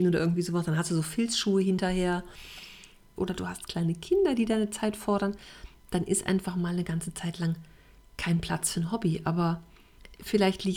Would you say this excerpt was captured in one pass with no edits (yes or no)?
no